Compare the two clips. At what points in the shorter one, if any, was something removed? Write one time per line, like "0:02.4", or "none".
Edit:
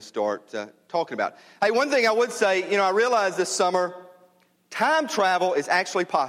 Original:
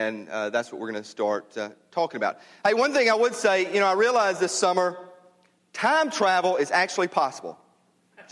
none